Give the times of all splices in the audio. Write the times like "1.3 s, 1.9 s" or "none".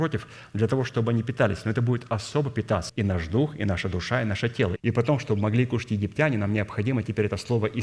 2.9 s, 4.8 s